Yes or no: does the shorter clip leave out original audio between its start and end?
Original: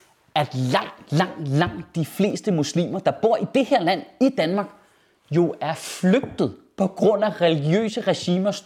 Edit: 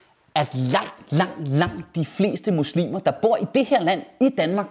no